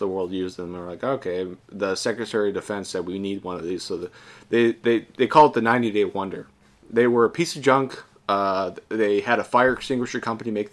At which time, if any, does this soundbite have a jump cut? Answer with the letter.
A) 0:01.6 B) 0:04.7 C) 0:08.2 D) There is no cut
D